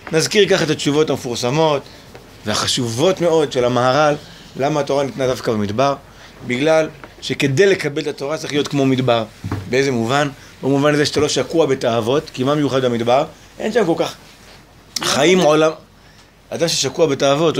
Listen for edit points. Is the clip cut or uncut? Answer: uncut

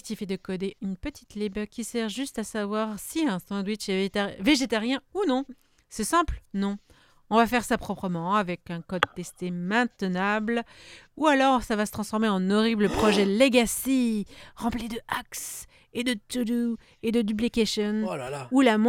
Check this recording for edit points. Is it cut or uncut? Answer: uncut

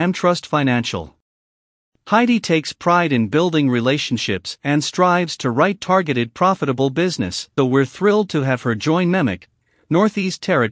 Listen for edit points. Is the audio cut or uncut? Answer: cut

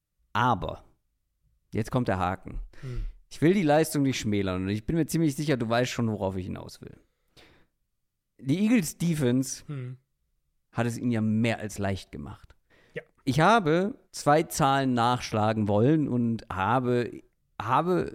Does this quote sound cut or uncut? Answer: cut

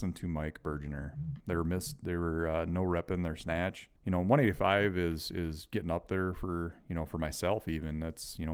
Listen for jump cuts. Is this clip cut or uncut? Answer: cut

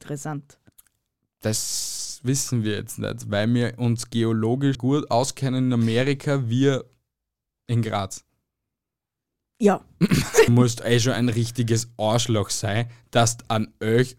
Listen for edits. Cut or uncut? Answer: cut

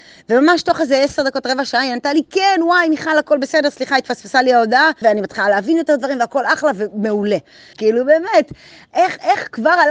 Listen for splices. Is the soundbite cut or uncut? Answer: cut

